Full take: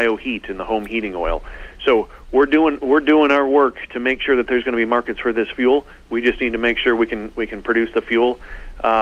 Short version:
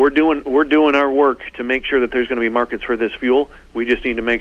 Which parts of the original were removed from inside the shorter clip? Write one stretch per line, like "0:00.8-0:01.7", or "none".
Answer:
none